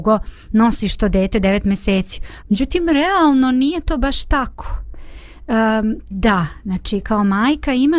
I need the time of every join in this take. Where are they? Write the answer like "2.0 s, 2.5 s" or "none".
2.4 s, 6.1 s